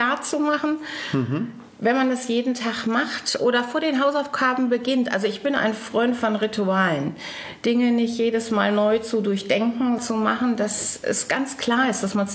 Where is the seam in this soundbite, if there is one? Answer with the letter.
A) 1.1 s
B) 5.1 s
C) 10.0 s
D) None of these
C